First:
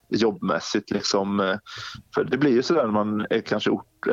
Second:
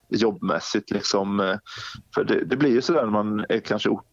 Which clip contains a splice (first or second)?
first